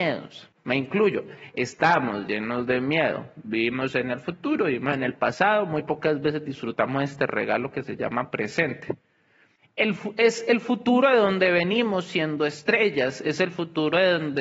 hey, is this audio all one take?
yes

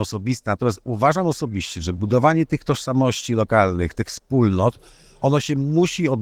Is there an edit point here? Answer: yes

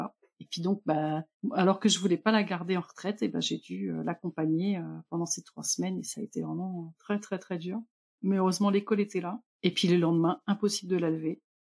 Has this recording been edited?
yes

